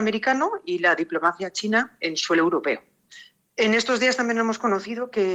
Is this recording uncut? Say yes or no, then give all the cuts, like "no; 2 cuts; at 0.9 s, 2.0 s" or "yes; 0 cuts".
no; 1 cut; at 3.4 s